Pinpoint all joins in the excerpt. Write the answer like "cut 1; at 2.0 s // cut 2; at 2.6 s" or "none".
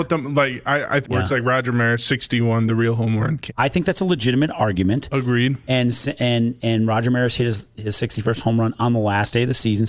cut 1; at 1.0 s // cut 2; at 3.5 s